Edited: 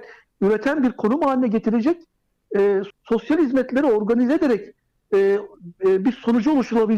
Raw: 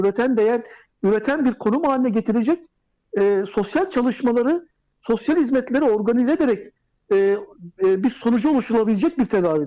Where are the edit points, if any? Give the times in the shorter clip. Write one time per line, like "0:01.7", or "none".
0:02.9